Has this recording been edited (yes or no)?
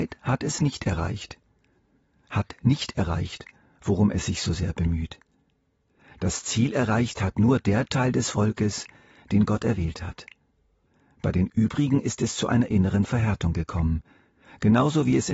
no